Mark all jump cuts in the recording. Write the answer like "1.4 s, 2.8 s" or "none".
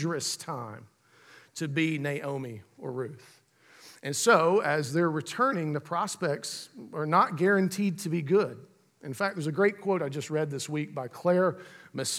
none